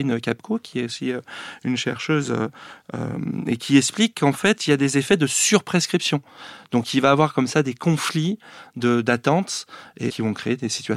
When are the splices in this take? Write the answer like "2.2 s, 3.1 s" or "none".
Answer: 6.6 s, 10.1 s